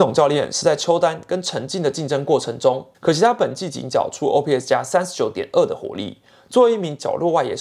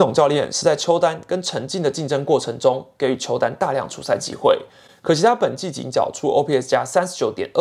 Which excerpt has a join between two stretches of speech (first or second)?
first